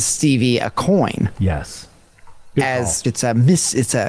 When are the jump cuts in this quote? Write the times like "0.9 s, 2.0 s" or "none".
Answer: 3.0 s